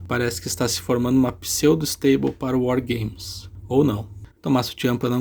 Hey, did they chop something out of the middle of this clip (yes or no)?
yes